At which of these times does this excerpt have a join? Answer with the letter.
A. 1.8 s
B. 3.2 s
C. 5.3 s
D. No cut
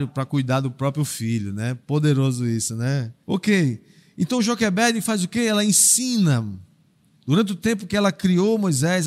B